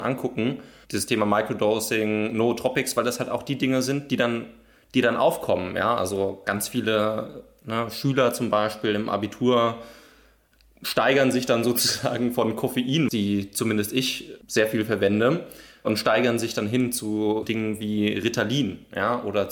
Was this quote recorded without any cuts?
no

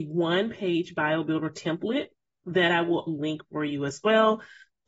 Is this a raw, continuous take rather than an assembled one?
no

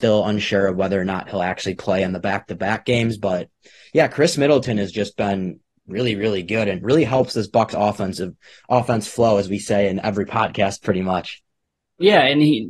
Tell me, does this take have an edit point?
no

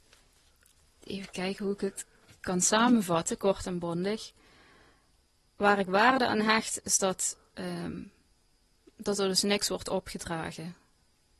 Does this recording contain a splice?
no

